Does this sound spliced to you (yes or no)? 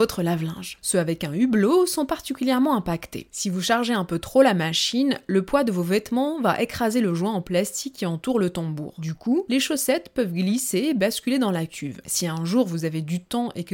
no